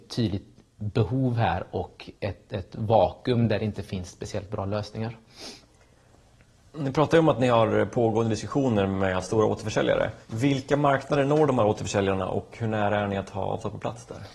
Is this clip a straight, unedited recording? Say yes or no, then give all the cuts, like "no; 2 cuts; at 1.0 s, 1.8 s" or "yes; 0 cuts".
no; 1 cut; at 10.2 s